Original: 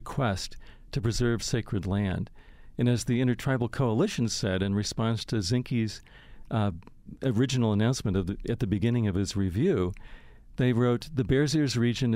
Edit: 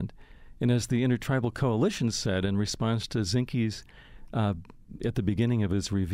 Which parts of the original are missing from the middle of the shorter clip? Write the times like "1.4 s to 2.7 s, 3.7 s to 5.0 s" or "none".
7.2 s to 8.4 s